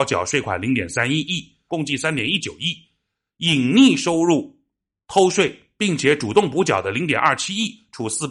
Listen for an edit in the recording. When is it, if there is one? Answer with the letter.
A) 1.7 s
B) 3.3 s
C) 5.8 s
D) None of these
A